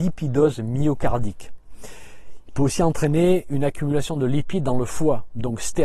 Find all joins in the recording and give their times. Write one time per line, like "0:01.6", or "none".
none

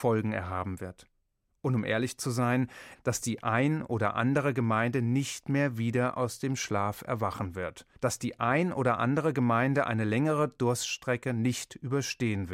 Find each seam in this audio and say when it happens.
0:02.9
0:07.9

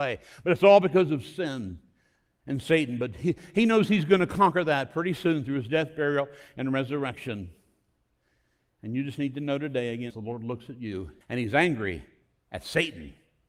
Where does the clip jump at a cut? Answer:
0:10.1
0:11.2

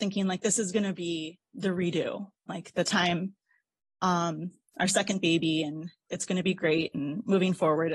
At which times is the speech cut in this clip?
0:04.6
0:06.1

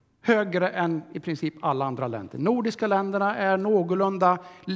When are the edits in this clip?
none

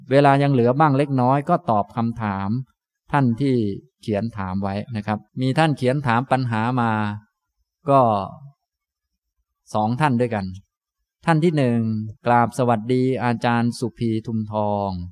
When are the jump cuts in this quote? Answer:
0:05.3
0:12.2

